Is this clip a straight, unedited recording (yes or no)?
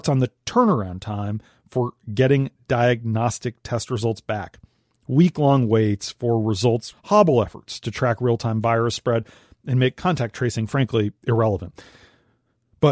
no